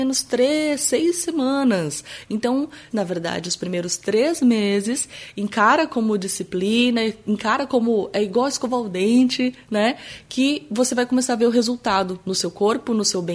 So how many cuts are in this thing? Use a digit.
1